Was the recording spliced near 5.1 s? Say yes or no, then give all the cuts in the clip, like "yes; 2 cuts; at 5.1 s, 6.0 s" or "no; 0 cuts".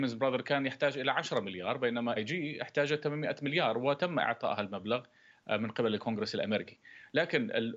no; 1 cut; at 2.2 s